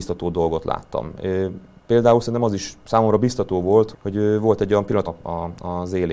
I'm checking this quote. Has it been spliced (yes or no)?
yes